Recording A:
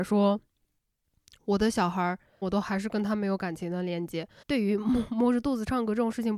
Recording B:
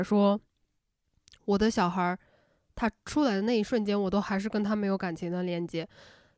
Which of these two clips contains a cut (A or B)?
A